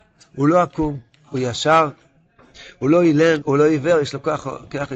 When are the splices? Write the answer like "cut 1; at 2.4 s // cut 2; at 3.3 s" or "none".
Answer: cut 1; at 3.4 s